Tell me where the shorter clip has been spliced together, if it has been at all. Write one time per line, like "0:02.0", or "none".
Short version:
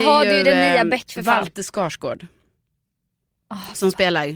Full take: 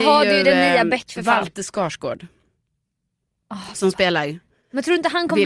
none